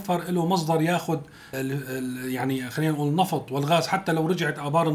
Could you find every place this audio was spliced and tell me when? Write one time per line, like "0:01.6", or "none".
0:01.5

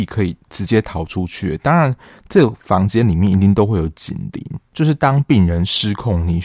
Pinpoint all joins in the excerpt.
none

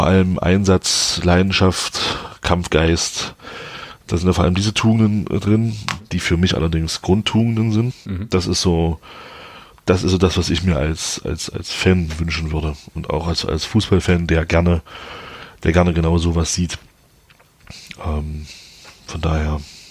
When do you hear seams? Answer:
0:07.9

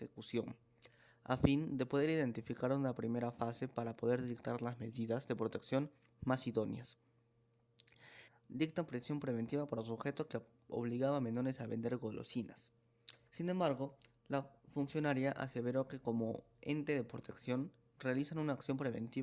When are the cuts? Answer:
0:08.3
0:13.3

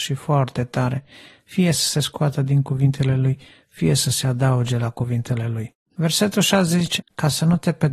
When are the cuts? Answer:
0:05.9
0:07.0

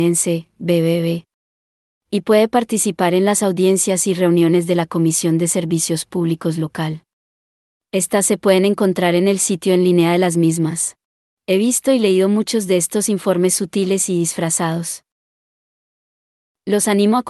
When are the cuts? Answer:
0:11.3

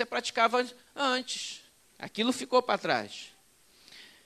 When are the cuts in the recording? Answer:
0:01.9

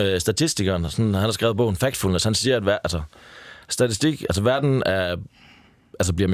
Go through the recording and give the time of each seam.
none

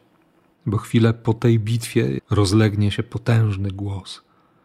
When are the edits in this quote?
0:02.2

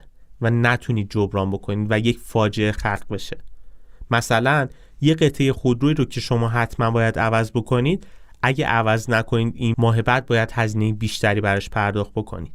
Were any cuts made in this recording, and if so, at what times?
0:09.7

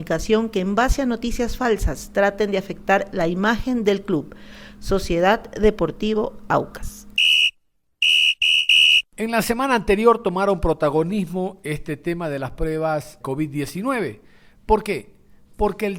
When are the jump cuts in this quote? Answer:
0:13.2

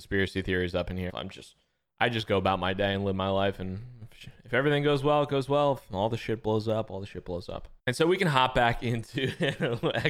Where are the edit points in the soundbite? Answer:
0:01.1
0:07.8

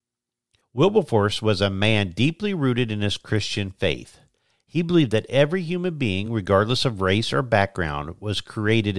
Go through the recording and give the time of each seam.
none

